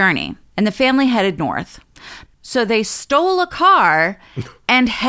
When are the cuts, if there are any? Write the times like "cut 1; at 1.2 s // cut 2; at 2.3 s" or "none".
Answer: cut 1; at 2.3 s